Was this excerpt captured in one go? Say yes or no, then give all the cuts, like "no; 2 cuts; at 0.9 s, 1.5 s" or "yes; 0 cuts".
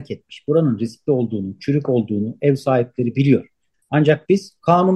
no; 1 cut; at 3.7 s